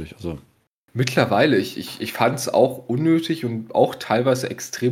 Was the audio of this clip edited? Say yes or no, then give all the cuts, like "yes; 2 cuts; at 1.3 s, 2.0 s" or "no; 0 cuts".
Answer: no; 0 cuts